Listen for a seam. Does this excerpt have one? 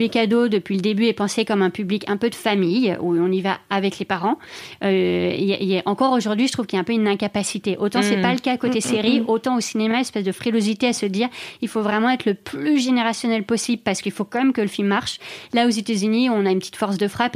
no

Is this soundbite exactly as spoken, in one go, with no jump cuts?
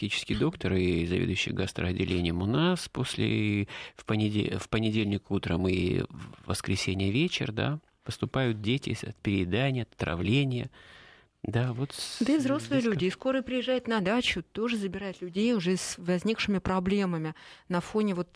yes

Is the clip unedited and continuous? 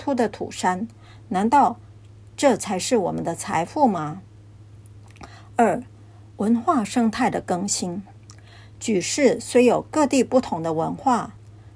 yes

